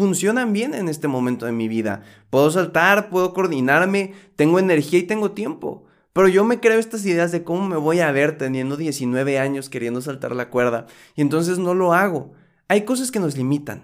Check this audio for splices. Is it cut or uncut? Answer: uncut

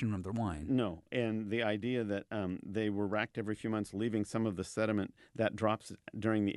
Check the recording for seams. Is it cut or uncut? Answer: uncut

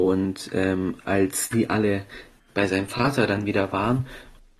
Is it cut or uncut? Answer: uncut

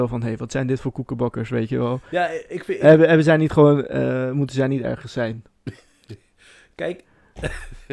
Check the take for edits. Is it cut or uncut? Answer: uncut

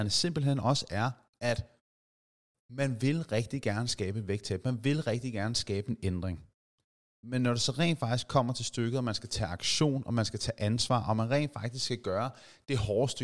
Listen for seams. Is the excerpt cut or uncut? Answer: uncut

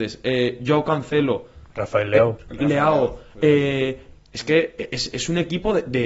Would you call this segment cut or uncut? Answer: cut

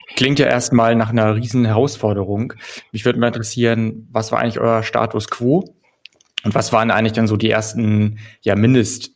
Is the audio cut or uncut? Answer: uncut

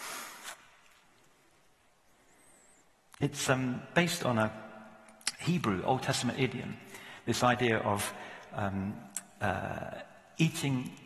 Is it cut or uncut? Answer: uncut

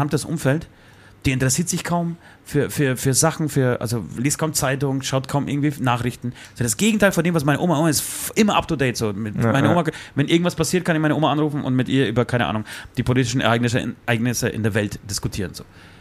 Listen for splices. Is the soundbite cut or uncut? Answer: uncut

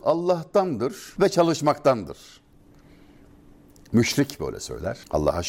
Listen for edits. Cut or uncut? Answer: uncut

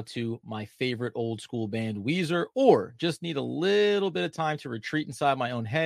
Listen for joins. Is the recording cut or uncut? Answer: uncut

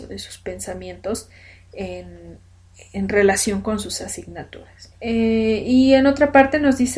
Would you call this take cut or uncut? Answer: cut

